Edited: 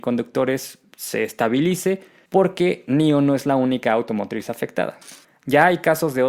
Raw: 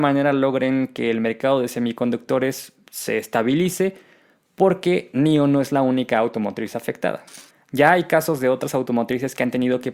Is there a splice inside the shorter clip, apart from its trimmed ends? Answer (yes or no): yes